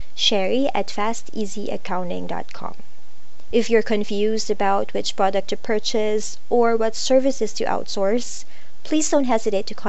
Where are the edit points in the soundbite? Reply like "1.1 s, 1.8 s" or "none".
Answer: 3.5 s